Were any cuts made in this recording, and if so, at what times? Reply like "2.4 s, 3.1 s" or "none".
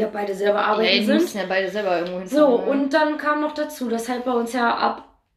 none